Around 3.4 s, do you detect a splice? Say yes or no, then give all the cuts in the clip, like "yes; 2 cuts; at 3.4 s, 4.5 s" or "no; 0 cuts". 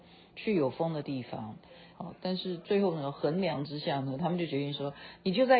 no; 1 cut; at 1.9 s